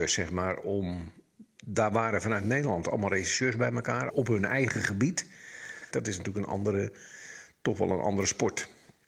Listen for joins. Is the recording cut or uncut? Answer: cut